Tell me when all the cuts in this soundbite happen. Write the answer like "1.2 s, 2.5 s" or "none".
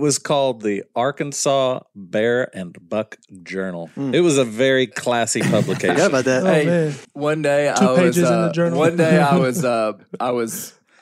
7.0 s

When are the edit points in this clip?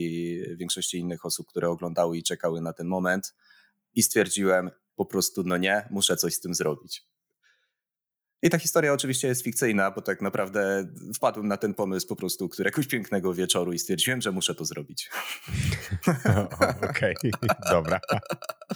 4.9 s

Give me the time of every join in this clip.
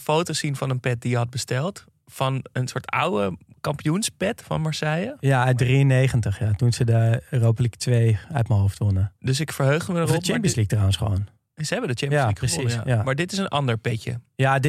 none

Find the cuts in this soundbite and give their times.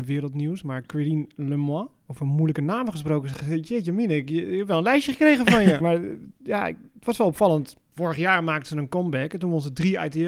5.8 s

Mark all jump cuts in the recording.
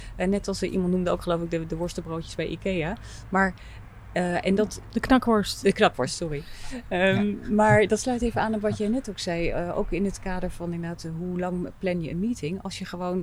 none

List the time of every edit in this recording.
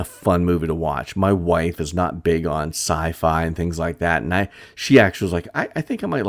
none

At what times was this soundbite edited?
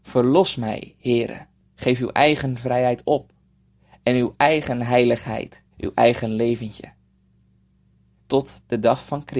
1.6 s, 5.7 s, 8.2 s

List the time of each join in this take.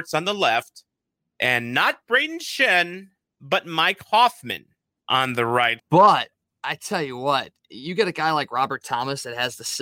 5.8 s

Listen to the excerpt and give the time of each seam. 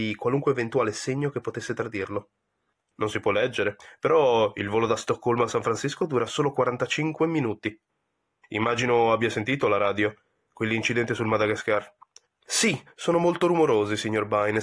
2.9 s, 8.4 s, 12.3 s

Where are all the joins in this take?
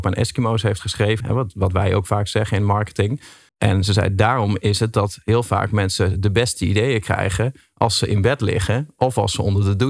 1.2 s, 3.5 s

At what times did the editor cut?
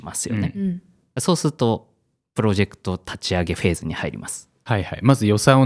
none

